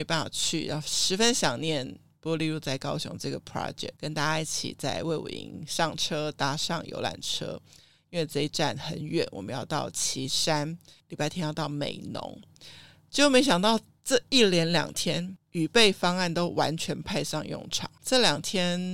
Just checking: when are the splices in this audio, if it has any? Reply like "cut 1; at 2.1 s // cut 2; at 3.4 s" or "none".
cut 1; at 4.0 s // cut 2; at 18.0 s